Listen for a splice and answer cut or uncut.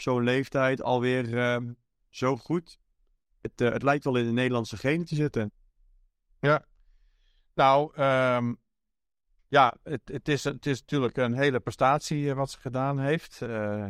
uncut